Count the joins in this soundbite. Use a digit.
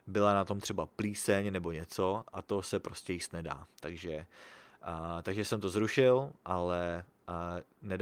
0